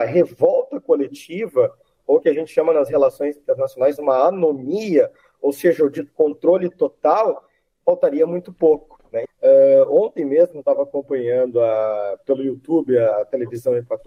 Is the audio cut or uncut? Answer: cut